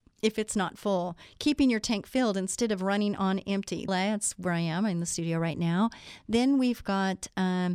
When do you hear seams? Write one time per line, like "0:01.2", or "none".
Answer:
0:03.9